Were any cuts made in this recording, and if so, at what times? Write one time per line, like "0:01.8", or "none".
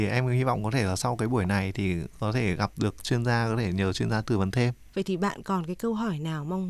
0:04.9